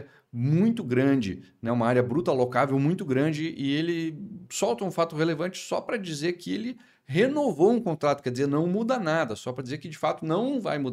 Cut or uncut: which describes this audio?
uncut